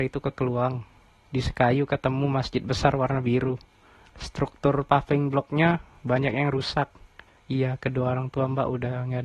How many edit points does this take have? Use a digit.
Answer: 3